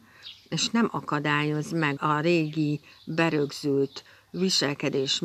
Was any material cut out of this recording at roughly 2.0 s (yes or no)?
yes